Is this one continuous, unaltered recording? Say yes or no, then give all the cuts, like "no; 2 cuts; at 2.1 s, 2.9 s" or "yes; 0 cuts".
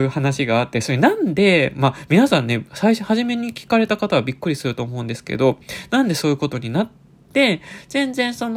no; 1 cut; at 7.1 s